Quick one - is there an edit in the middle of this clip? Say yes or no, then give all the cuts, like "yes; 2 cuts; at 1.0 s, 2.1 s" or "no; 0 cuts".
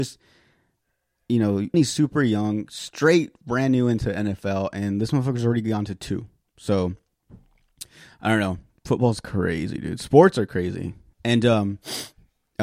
yes; 2 cuts; at 1.7 s, 11.1 s